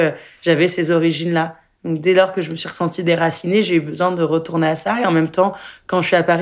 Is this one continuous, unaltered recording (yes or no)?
yes